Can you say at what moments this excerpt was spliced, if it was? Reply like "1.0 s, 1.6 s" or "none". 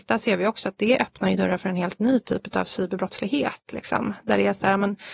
none